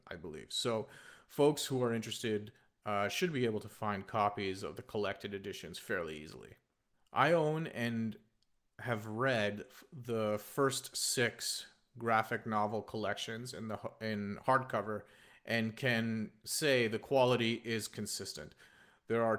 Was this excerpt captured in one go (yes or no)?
yes